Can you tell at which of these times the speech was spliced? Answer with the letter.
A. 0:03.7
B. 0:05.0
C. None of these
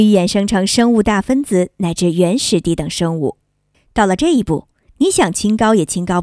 A